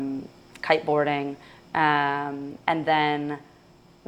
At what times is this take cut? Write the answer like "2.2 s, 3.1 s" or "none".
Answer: none

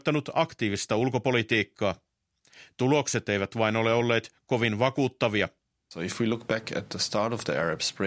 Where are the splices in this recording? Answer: none

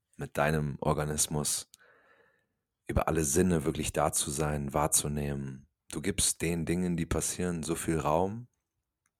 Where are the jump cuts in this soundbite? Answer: 5.8 s

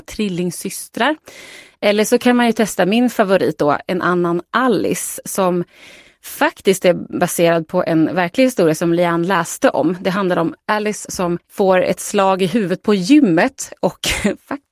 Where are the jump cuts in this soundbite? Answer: none

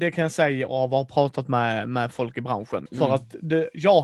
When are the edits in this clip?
2.9 s

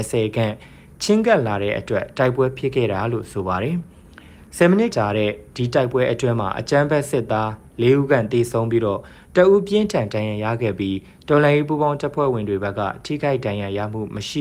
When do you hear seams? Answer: 4.9 s

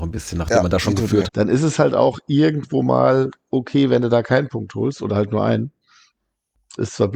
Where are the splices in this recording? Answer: 1.3 s

